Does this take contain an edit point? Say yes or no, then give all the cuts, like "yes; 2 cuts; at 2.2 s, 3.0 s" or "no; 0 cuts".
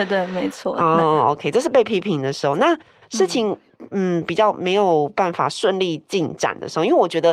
no; 0 cuts